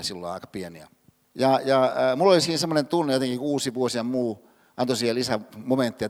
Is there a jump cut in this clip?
yes; 1 cut; at 1.2 s

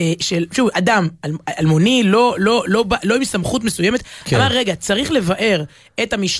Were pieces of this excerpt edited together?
no; 0 cuts

